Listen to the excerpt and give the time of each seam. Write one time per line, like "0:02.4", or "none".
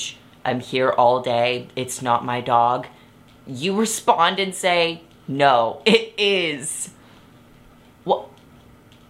0:07.8